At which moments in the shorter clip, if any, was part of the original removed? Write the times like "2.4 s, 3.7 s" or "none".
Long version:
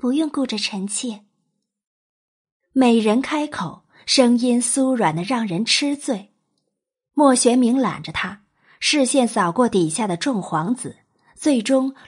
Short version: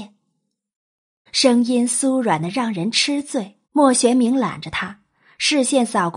1.3 s, 3.6 s

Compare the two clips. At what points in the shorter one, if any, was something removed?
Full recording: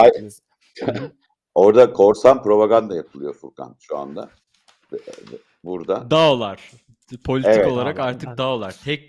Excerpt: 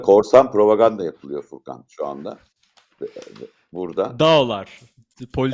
none

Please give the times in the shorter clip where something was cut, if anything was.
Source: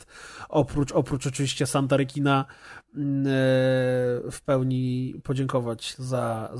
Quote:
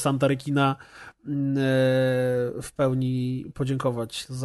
none

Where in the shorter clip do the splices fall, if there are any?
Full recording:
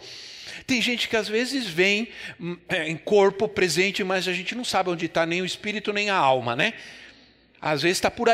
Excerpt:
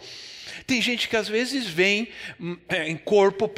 none

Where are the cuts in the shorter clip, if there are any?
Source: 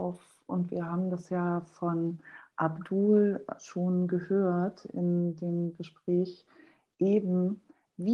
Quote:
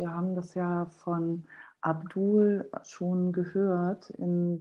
none

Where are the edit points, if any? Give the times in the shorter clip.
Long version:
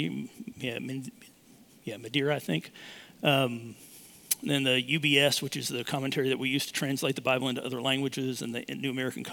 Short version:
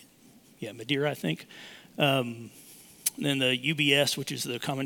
none

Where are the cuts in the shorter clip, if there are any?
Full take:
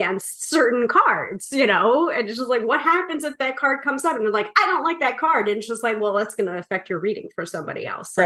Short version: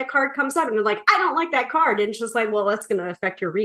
none

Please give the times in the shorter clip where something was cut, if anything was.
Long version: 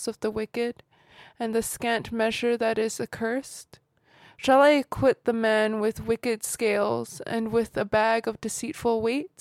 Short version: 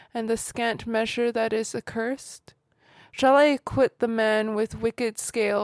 none

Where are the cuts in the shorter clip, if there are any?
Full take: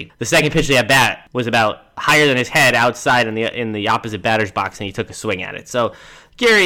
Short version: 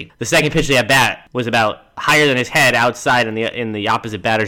none

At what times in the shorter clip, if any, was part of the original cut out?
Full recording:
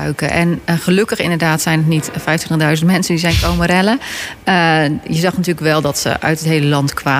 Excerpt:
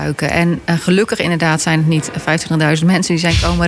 none

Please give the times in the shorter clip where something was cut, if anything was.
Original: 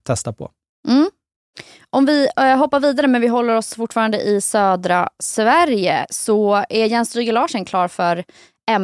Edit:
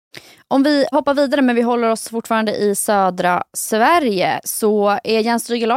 0.9 s

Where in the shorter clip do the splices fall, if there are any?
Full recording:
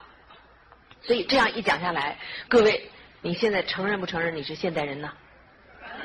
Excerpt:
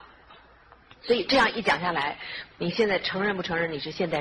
2.5 s

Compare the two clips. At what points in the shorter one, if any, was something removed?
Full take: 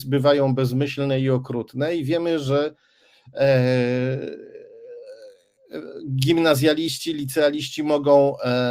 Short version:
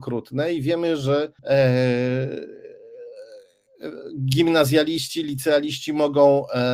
1.4 s

